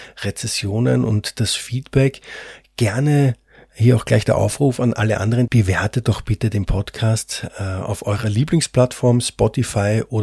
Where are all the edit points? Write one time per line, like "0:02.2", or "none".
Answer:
0:05.5